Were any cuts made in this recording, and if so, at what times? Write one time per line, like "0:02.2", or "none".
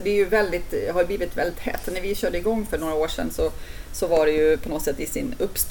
none

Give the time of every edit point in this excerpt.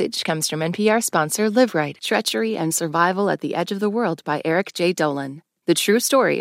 0:02.0

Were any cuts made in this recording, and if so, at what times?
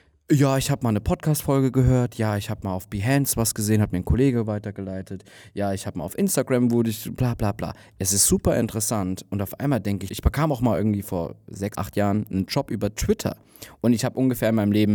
0:10.1
0:11.7

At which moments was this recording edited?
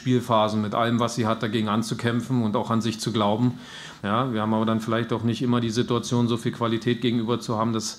0:04.0

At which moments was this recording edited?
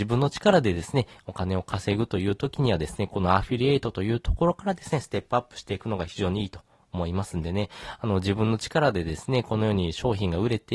none

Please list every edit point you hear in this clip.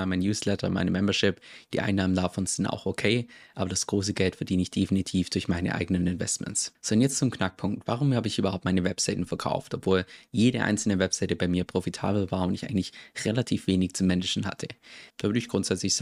0:15.1

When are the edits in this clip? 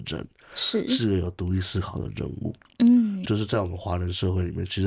0:03.3

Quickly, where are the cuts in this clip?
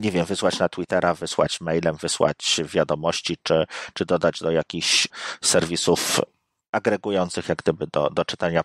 none

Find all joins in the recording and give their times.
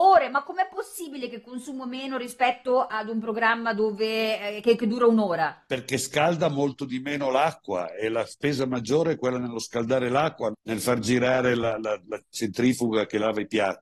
0:10.5

